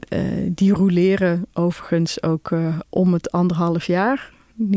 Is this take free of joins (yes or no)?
no